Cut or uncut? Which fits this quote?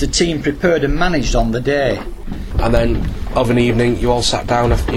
cut